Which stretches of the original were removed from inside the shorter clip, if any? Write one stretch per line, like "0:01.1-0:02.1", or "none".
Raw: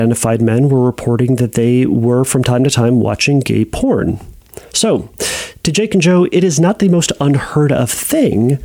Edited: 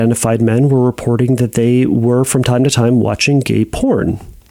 none